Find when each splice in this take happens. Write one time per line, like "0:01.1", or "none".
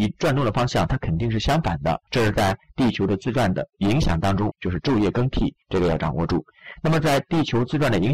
0:02.1
0:04.5
0:05.6